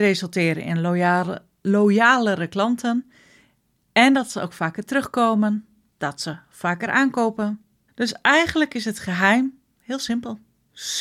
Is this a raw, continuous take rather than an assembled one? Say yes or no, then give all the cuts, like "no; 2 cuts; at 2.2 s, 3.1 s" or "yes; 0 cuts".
yes; 0 cuts